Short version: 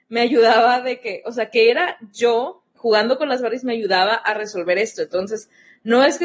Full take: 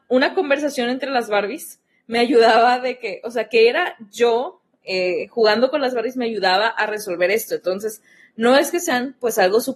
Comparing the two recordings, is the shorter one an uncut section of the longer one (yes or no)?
no